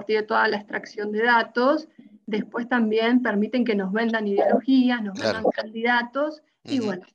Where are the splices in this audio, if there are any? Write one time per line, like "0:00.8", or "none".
none